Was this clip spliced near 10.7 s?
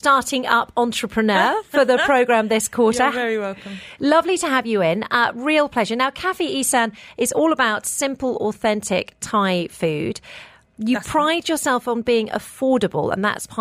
no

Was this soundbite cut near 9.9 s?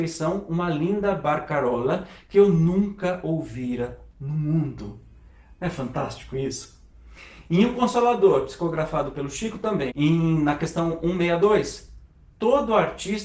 yes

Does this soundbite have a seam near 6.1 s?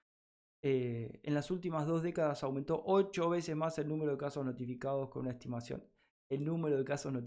no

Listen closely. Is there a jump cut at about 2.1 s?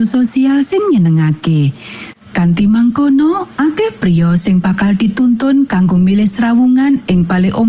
yes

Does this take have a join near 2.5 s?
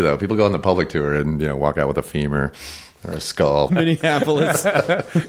no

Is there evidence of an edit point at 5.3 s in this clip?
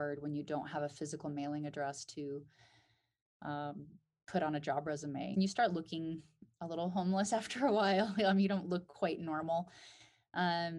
yes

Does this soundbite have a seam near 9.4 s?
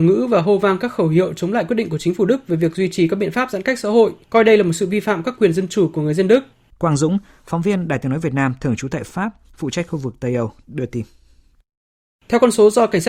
no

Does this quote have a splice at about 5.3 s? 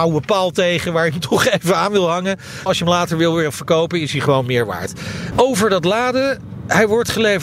yes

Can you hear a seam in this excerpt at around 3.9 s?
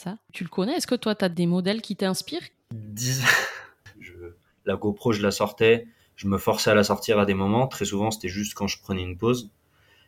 yes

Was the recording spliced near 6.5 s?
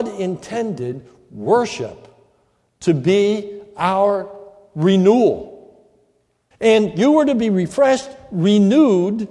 yes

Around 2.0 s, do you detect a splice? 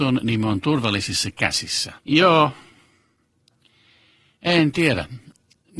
yes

